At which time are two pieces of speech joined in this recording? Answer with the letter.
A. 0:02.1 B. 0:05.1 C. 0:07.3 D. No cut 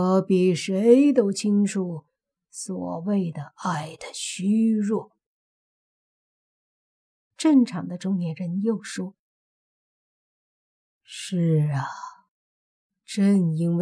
C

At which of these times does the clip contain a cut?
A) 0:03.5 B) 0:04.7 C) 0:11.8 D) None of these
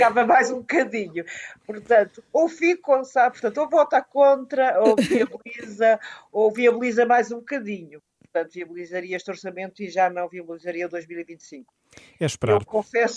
B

